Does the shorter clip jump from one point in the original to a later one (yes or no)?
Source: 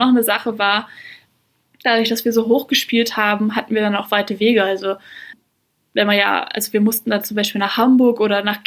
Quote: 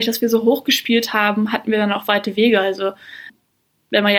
no